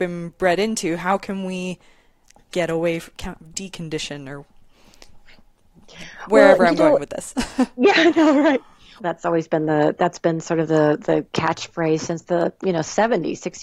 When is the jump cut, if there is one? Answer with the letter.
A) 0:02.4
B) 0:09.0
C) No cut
B